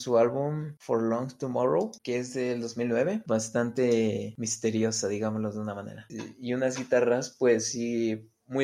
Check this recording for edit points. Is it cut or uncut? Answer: cut